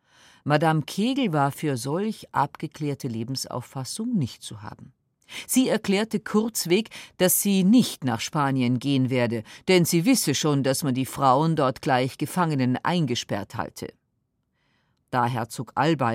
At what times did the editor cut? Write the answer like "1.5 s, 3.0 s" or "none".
none